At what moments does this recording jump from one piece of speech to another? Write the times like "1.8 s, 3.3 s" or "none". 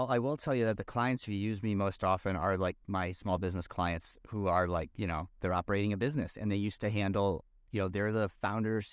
5.3 s